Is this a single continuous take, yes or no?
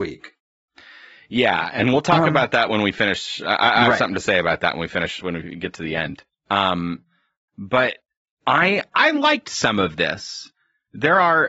yes